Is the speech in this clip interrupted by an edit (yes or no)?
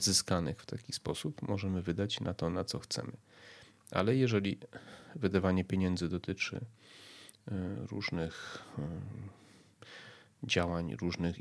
no